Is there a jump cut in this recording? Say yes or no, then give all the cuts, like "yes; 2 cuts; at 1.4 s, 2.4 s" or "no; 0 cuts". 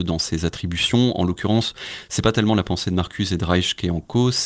no; 0 cuts